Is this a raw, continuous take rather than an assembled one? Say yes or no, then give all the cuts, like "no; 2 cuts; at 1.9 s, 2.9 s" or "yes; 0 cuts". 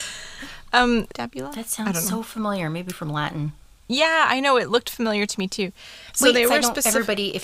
no; 1 cut; at 1.1 s